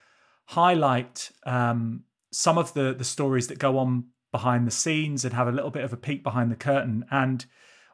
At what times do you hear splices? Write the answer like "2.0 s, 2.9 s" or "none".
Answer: none